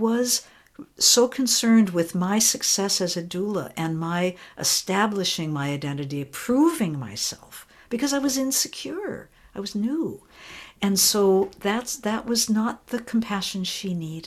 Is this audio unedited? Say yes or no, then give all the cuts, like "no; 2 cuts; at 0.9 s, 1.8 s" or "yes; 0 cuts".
yes; 0 cuts